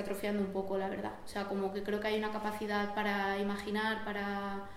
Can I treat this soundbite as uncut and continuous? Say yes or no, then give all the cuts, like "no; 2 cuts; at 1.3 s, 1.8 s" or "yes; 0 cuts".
yes; 0 cuts